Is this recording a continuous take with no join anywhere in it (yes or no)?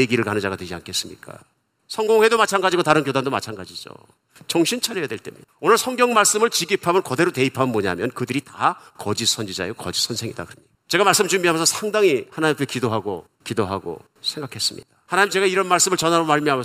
no